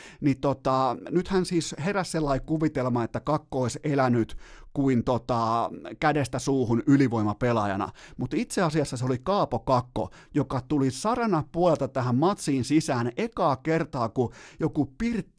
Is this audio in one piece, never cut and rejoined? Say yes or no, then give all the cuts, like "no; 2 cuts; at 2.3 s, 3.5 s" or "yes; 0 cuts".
yes; 0 cuts